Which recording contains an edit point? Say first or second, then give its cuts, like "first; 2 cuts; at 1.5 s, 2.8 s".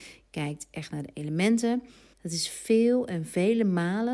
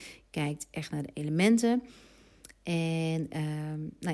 first; 1 cut; at 2.1 s